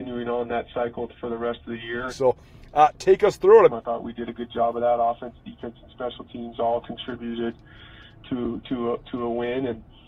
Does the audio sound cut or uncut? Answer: cut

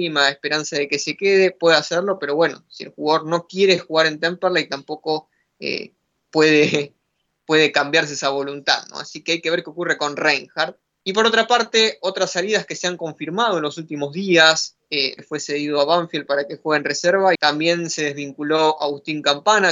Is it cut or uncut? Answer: cut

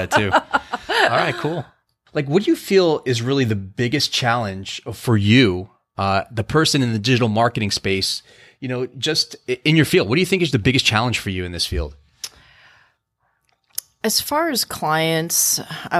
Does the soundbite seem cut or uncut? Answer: uncut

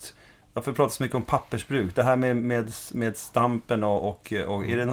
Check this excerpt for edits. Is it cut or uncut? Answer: uncut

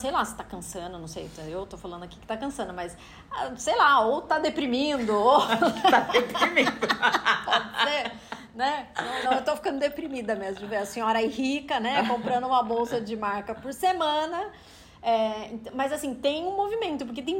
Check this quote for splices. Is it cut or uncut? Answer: cut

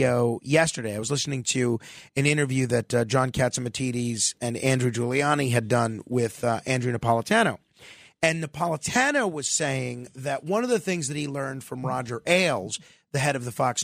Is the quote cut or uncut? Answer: uncut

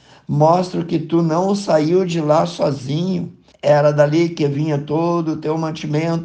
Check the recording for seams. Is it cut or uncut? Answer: cut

